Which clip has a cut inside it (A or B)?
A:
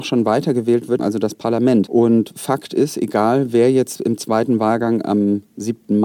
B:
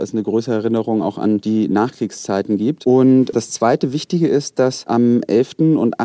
A